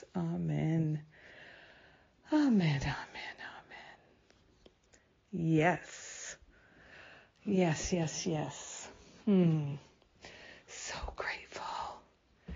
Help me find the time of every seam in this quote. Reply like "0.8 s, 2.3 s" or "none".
none